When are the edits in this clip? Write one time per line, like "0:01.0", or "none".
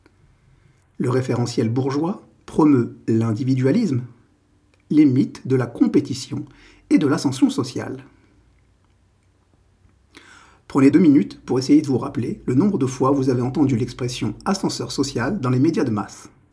0:10.9